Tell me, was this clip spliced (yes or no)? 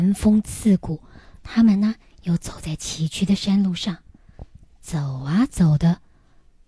no